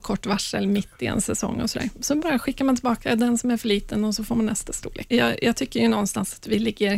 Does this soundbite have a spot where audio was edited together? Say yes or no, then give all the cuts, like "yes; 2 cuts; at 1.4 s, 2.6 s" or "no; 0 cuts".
yes; 1 cut; at 5.1 s